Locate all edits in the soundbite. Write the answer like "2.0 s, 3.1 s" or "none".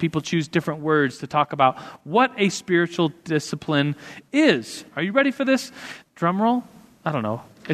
4.9 s, 6.0 s